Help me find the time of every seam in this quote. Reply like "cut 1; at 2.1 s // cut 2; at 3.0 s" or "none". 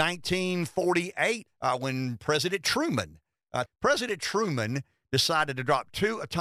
cut 1; at 1.5 s // cut 2; at 3.7 s